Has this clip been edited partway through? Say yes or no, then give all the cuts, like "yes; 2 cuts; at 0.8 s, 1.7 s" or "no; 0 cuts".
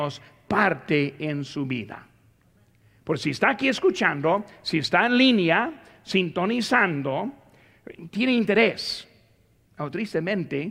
yes; 1 cut; at 8.1 s